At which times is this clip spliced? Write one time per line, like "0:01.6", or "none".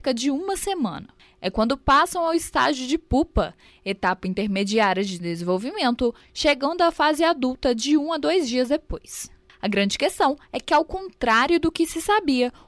none

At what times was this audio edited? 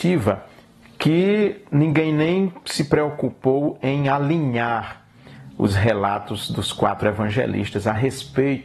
none

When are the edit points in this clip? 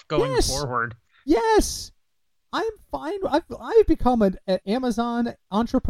0:04.6

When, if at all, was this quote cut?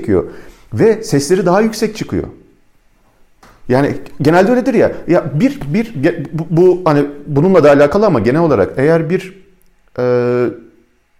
none

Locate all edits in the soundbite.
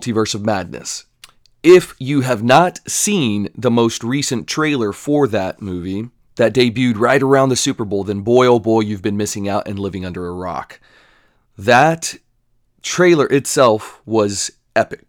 none

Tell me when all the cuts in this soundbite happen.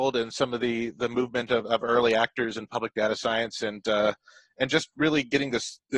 none

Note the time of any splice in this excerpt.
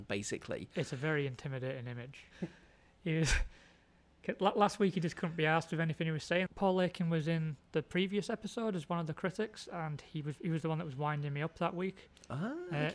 0:02.3
0:06.5

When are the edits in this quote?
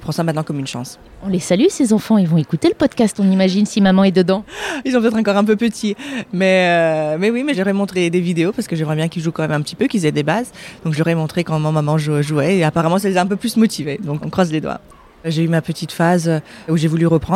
0:14.2

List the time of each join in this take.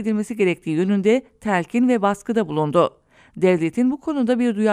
none

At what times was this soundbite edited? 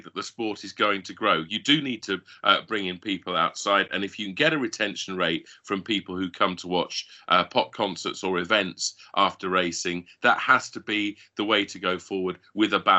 none

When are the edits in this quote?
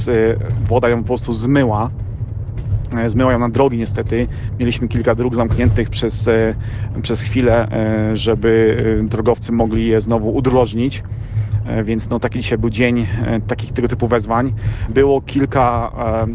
0:14.9

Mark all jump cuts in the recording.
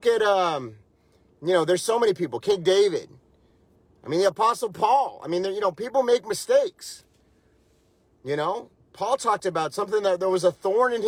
none

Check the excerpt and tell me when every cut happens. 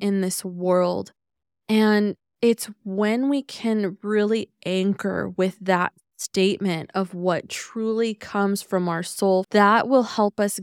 0:09.4

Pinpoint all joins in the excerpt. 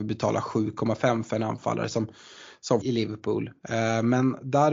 0:02.8

